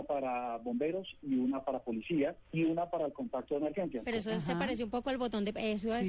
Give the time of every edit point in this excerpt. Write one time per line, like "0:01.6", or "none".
0:02.4
0:04.0